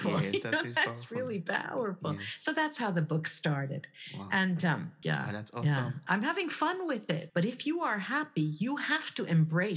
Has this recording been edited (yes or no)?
yes